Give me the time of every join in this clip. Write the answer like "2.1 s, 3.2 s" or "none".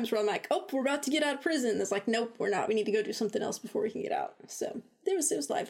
none